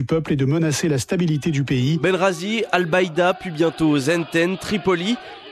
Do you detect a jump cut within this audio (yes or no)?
no